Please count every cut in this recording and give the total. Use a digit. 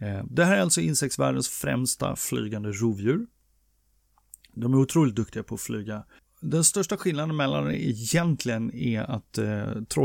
2